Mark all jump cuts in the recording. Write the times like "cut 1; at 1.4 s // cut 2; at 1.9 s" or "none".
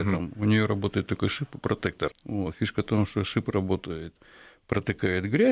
cut 1; at 2.1 s